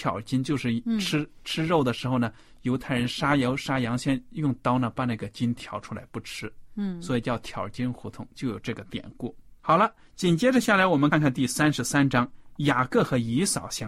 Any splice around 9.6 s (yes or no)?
yes